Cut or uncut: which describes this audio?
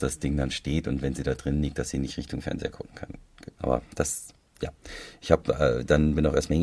cut